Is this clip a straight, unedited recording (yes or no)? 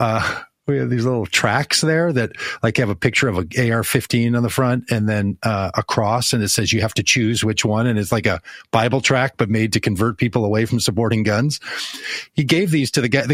yes